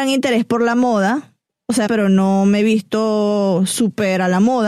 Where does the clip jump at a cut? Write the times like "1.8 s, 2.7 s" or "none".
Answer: 1.9 s